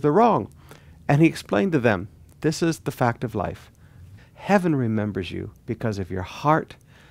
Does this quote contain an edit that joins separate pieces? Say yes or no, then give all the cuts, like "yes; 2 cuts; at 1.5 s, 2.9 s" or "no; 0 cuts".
yes; 2 cuts; at 4.2 s, 5.6 s